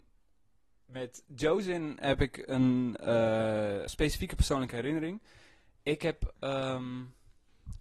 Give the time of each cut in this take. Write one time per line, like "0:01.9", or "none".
0:03.9